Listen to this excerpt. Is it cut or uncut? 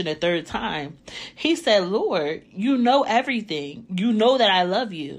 uncut